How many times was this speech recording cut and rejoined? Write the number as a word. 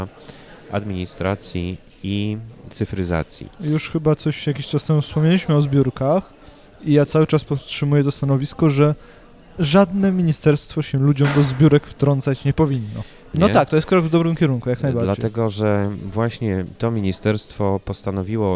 one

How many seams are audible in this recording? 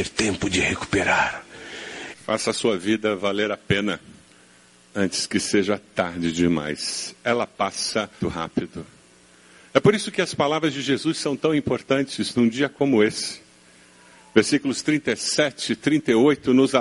two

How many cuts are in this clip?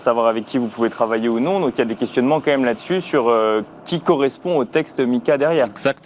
zero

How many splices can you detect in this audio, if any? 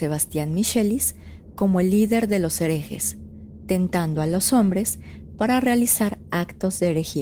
zero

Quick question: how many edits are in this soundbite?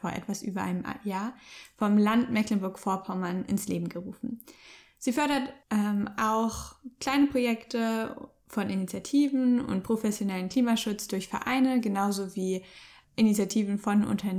one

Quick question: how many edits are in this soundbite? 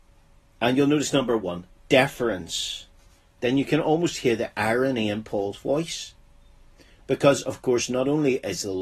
one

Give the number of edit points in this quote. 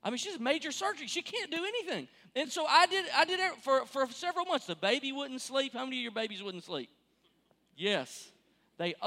zero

